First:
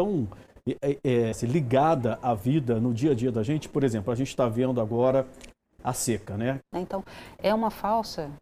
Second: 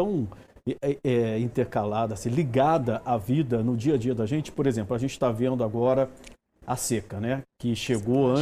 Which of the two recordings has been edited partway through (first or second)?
first